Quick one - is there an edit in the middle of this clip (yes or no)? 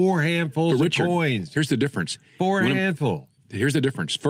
no